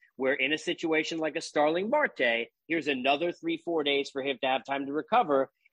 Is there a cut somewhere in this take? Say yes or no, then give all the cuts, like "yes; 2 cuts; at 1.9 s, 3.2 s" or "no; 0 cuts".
no; 0 cuts